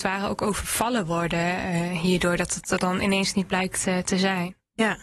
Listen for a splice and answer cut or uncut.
uncut